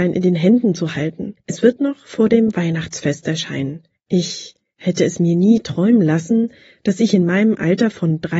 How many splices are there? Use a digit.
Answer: 0